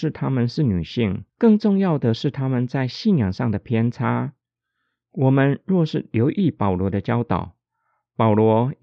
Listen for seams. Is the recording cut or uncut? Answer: uncut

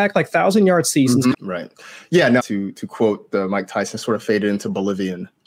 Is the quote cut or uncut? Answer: cut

